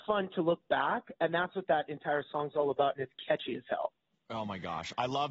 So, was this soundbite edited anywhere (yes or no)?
no